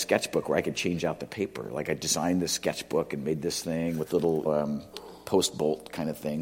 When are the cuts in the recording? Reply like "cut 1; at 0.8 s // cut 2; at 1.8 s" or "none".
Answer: cut 1; at 4.4 s

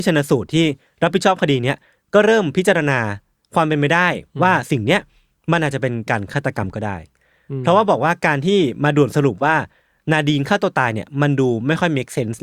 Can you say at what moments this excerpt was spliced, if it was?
none

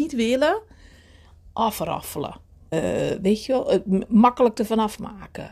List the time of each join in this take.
cut 1; at 2.7 s

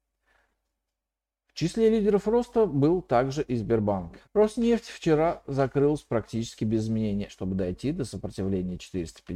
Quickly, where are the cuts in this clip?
cut 1; at 4.2 s // cut 2; at 7.3 s

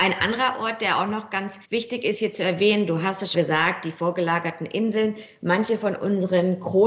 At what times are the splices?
cut 1; at 1.6 s // cut 2; at 3.3 s

